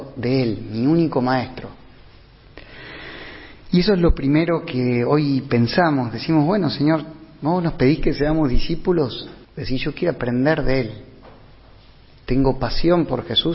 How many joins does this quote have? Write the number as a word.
one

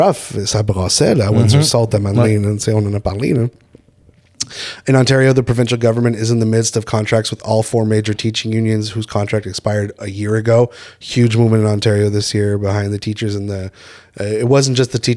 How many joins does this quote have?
zero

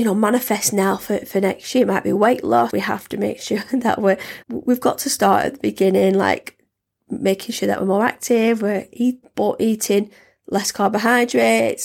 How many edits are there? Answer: three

